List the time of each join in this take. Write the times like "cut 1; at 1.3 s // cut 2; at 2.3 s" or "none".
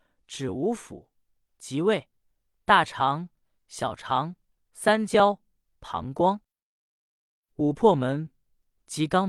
none